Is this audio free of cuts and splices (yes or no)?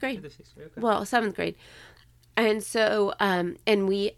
yes